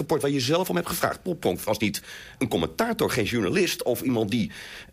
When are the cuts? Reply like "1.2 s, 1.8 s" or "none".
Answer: none